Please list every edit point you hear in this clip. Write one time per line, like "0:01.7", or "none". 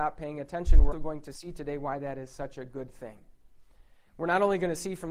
0:00.9